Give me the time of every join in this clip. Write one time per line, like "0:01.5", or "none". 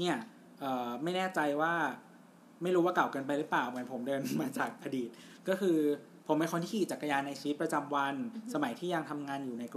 none

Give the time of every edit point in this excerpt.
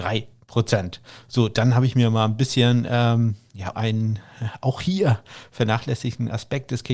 0:03.7

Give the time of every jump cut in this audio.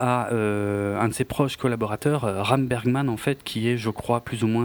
none

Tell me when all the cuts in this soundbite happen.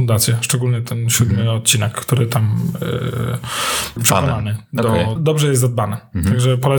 0:04.0
0:05.2

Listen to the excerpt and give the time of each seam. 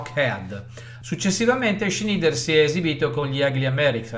0:01.0

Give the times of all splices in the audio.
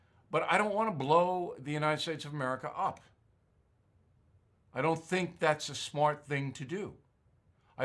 none

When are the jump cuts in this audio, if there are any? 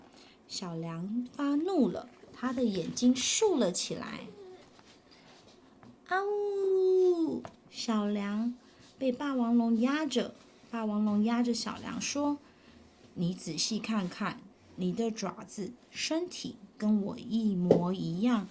none

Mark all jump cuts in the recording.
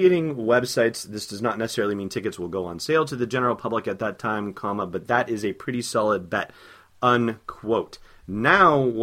none

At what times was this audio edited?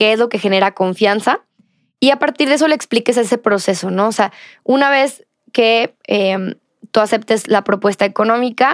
none

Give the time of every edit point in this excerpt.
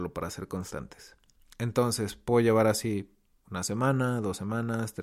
none

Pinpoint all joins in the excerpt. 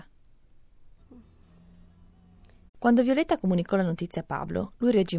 0:01.0
0:02.7

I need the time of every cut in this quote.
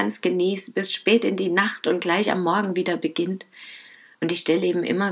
0:04.1

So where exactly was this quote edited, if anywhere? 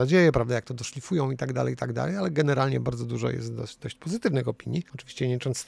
none

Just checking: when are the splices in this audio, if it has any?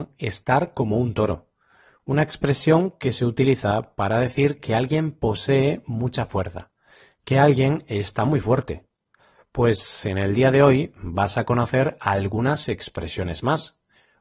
none

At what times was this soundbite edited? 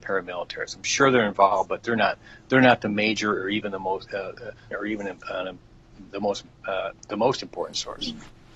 0:04.7

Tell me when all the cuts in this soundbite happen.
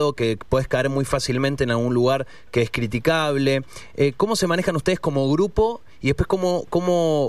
none

